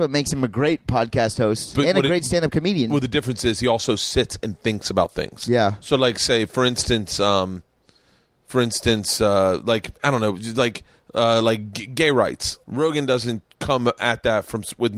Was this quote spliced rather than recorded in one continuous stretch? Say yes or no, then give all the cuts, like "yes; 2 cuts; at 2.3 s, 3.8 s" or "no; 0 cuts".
yes; 1 cut; at 12.6 s